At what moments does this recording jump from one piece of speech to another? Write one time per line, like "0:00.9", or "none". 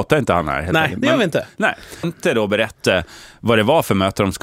0:02.0